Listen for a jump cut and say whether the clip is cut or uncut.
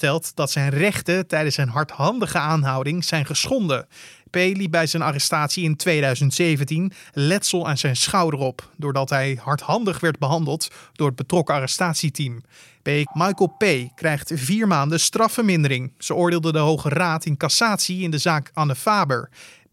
cut